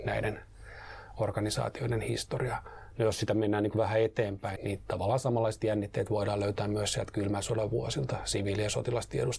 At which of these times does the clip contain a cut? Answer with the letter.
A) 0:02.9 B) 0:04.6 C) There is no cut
B